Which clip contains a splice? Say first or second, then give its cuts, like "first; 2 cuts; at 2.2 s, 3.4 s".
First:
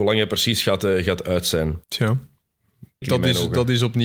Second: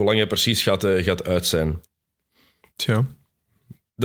first; 2 cuts; at 1.8 s, 3.0 s